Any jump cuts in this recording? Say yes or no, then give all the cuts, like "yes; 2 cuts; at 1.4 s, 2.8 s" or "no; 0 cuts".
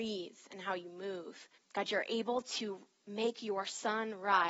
yes; 1 cut; at 1.5 s